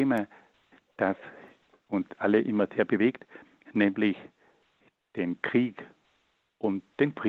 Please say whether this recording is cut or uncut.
uncut